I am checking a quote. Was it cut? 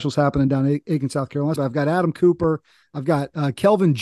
yes; 1 cut; at 1.6 s

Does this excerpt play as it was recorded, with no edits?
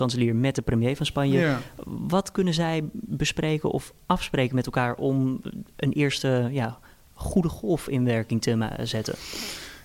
yes; 0 cuts

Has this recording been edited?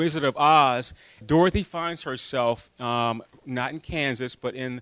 yes; 1 cut; at 1.2 s

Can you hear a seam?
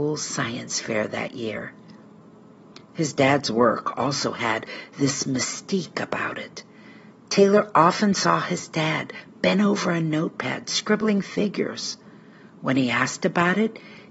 no; 0 cuts

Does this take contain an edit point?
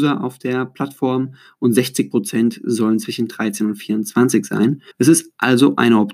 yes; 1 cut; at 4.9 s

